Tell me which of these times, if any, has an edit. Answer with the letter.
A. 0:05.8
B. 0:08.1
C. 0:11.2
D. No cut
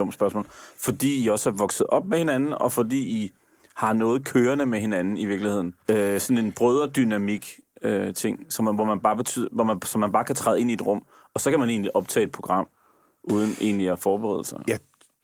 A